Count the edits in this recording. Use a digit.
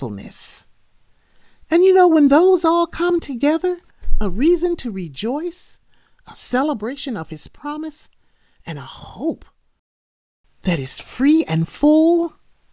0